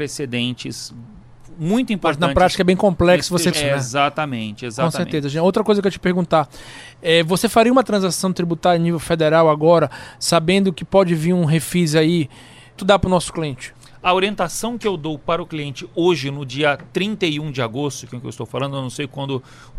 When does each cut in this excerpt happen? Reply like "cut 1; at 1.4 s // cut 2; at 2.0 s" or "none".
cut 1; at 3.5 s // cut 2; at 12.8 s